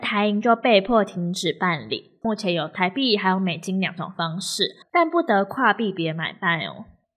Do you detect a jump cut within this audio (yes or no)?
yes